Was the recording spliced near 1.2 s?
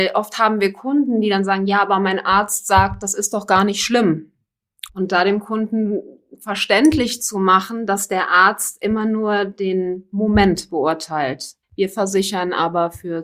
no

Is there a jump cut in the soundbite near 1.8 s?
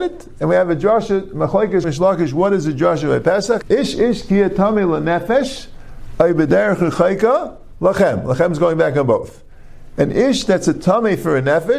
yes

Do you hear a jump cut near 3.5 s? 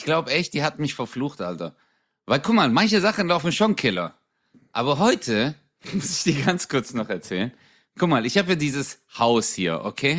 no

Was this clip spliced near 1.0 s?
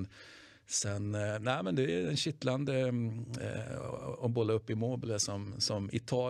no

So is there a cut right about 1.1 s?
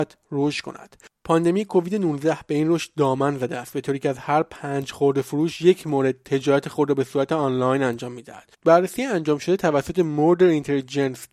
no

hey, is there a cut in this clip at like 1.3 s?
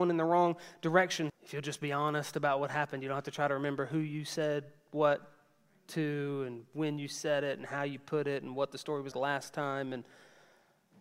yes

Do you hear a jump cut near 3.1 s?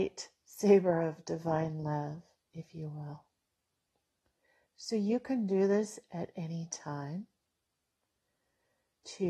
no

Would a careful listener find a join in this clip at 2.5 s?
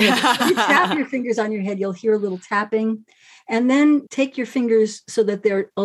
no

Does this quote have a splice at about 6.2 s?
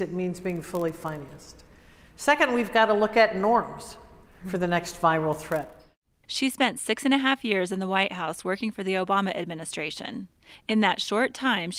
yes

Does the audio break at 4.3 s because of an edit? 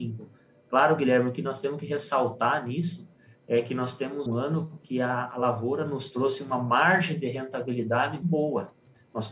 yes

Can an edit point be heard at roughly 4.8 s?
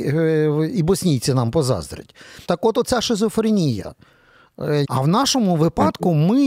yes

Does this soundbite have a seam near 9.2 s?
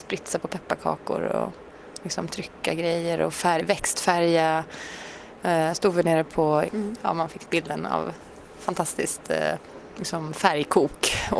no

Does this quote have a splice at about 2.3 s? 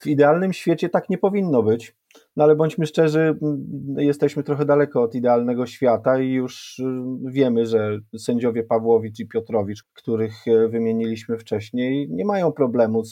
no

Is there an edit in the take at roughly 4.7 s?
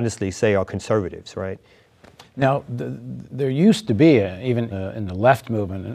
yes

